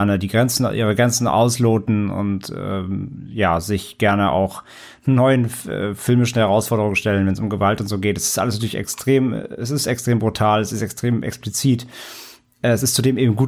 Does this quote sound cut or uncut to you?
uncut